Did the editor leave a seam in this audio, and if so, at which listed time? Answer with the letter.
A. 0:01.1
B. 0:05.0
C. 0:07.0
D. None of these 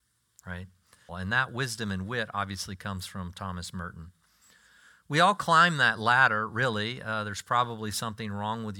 A